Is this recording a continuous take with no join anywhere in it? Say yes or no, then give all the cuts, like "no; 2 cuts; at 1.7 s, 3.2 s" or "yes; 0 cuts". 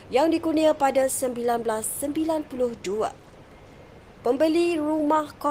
yes; 0 cuts